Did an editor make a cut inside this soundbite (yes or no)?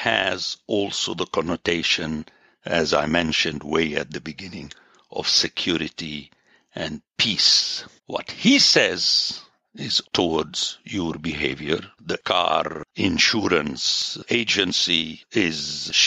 yes